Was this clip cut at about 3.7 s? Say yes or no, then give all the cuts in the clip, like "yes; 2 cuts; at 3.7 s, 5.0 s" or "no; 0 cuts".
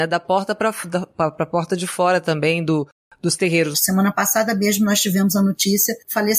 yes; 1 cut; at 3.7 s